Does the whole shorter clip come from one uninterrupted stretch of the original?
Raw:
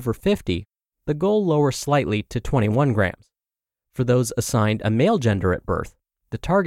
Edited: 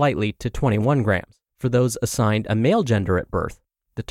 no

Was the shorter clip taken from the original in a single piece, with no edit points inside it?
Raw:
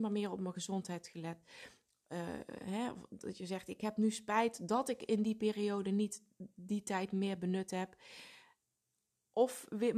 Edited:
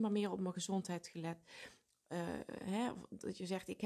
yes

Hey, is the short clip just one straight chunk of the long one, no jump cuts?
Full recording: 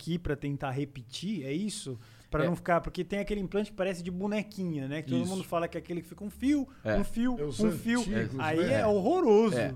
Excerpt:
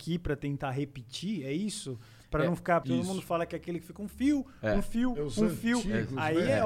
no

